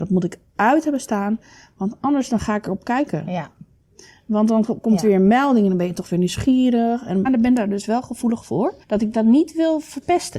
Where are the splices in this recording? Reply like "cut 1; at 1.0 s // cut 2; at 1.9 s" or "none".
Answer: cut 1; at 7.3 s // cut 2; at 8.8 s